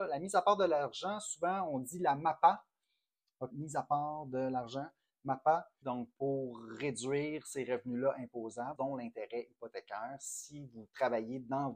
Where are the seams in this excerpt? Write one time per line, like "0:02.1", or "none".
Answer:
0:03.5
0:05.8
0:08.8